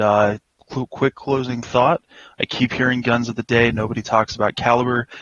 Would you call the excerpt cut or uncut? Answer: uncut